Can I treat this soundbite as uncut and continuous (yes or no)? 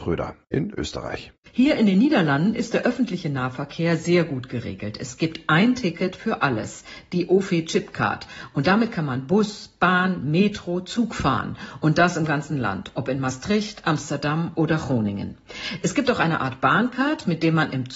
yes